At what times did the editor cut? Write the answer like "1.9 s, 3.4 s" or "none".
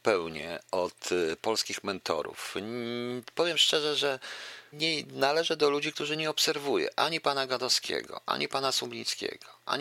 4.7 s